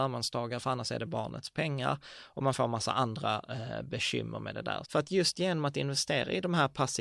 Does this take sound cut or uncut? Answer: cut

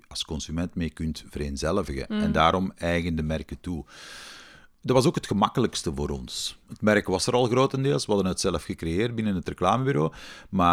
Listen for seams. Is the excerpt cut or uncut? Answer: uncut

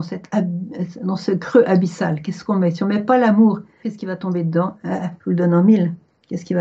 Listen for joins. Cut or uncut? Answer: cut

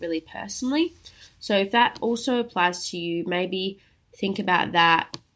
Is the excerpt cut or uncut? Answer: uncut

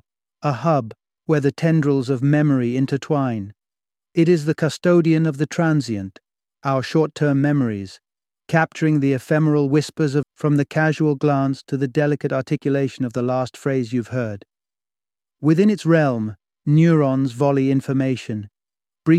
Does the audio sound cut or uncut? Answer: cut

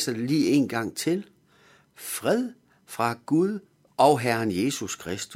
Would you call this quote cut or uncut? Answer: cut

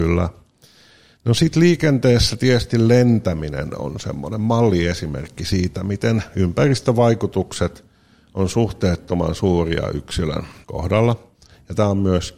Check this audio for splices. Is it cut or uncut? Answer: cut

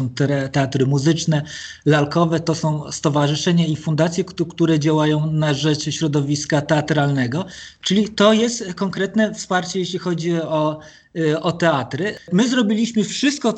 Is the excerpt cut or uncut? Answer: uncut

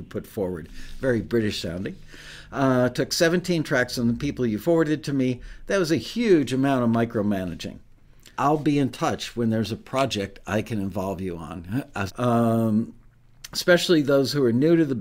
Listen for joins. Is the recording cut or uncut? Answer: cut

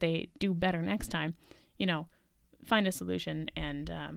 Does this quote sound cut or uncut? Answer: uncut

